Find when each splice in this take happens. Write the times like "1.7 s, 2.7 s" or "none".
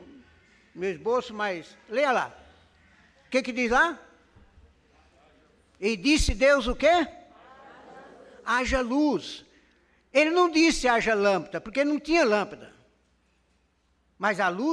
none